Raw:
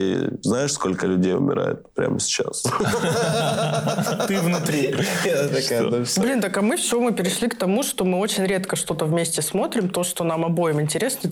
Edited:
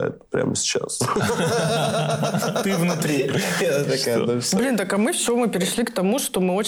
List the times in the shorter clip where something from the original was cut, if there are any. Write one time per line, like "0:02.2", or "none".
none